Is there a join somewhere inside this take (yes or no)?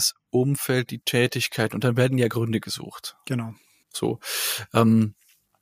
no